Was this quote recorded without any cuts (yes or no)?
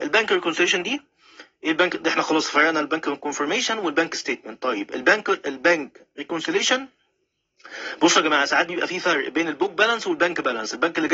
yes